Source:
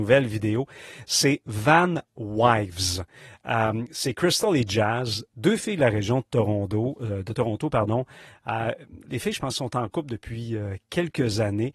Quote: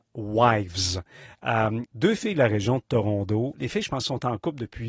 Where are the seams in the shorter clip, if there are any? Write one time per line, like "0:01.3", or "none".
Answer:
0:01.9
0:03.5